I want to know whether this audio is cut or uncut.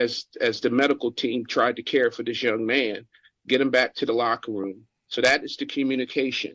uncut